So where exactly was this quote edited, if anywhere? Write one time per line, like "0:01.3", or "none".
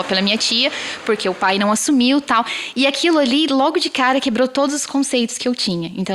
none